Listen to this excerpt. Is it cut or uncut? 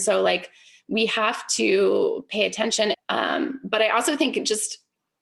cut